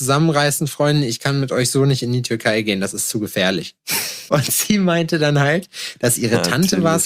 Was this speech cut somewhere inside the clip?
yes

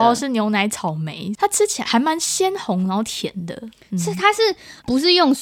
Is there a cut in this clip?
no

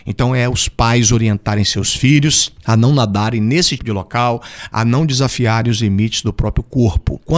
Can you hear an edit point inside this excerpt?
yes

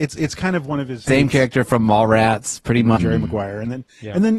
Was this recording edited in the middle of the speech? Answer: yes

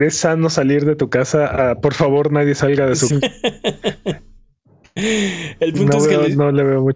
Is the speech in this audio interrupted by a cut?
yes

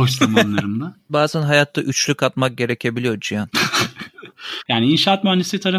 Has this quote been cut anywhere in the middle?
yes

